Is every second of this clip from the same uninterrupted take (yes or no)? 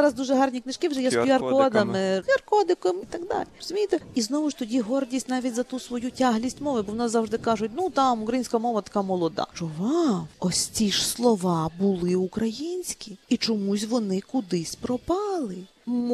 no